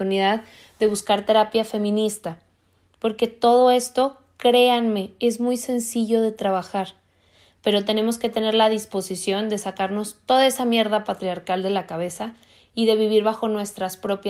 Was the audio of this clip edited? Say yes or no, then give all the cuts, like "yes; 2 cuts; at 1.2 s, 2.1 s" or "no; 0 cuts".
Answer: no; 0 cuts